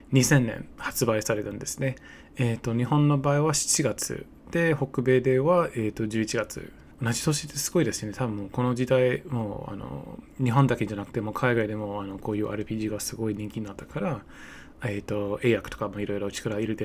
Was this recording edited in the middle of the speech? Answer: yes; 1 cut; at 6.9 s

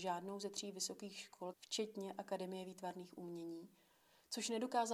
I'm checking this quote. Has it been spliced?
yes; 1 cut; at 1.5 s

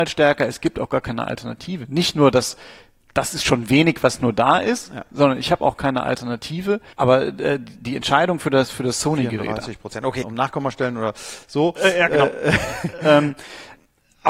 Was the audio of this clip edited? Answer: yes; 2 cuts; at 6.9 s, 10.2 s

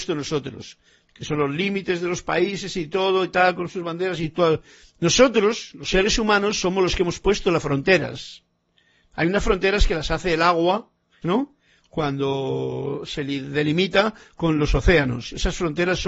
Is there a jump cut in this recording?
yes; 2 cuts; at 4.9 s, 11.2 s

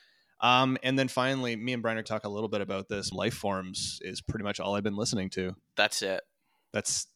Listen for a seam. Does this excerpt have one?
yes; 2 cuts; at 2.0 s, 3.1 s

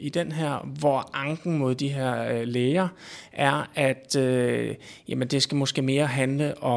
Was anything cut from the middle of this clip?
no; 0 cuts

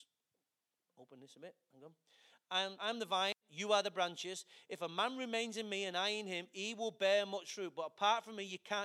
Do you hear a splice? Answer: yes; 1 cut; at 2.8 s

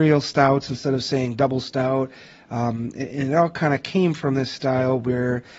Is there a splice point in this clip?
no; 0 cuts

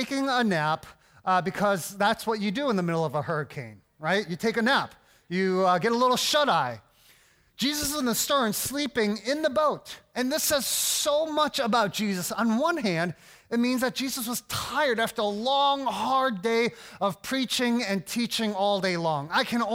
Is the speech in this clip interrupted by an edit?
no; 0 cuts

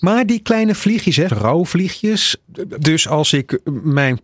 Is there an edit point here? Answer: yes; 2 cuts; at 1.3 s, 2.8 s

